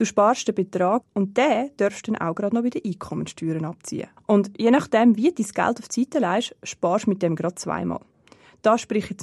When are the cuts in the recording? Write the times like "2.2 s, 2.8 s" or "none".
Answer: 1.0 s, 4.2 s